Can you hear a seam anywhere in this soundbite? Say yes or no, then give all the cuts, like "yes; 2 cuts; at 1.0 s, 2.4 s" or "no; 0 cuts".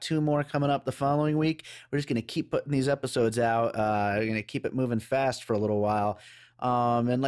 no; 0 cuts